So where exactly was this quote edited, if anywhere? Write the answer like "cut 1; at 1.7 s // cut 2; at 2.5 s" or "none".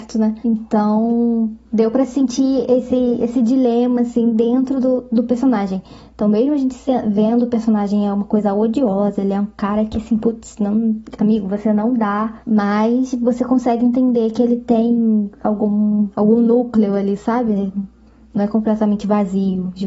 none